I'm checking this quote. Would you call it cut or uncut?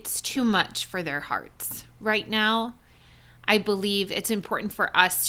uncut